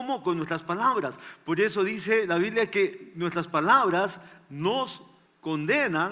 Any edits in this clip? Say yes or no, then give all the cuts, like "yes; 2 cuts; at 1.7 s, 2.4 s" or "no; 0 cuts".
no; 0 cuts